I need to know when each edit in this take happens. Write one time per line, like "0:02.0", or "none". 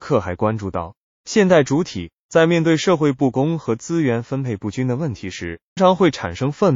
0:05.8